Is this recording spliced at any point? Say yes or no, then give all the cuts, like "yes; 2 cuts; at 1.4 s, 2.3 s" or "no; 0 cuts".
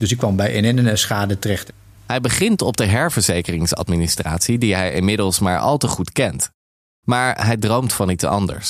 no; 0 cuts